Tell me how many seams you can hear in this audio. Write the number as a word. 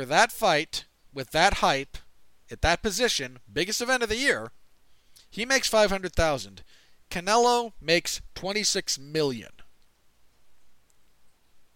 zero